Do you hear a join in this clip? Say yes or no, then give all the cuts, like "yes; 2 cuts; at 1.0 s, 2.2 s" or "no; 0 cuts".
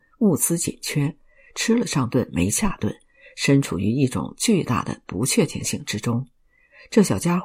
no; 0 cuts